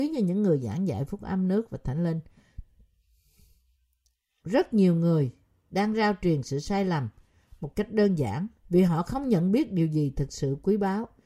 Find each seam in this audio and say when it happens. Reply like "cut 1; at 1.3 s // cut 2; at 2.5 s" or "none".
cut 1; at 4.4 s // cut 2; at 8.6 s